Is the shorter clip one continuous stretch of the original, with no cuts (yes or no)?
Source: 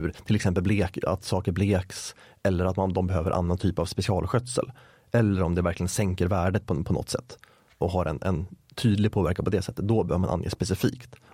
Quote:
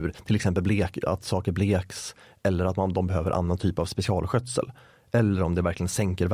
yes